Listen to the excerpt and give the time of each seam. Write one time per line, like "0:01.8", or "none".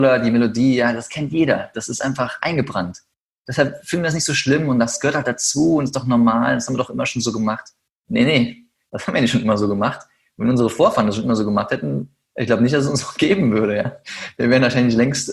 none